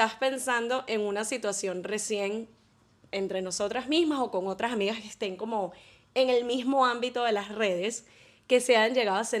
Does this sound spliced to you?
no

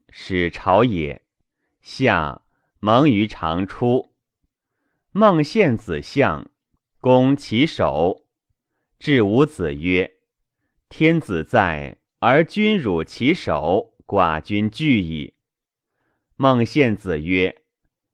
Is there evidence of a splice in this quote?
no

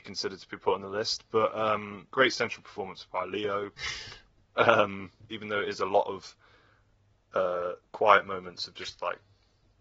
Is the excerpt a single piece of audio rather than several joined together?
no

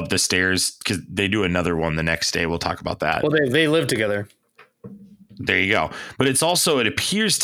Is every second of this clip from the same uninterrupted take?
yes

